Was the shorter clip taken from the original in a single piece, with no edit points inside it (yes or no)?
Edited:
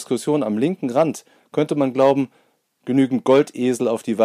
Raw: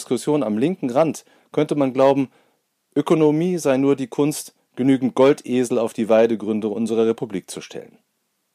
no